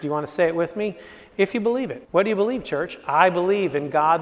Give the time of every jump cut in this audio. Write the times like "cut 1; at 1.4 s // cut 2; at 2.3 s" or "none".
cut 1; at 2.0 s